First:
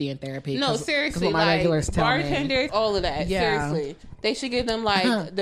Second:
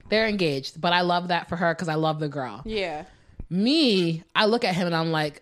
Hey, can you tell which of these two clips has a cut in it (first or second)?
first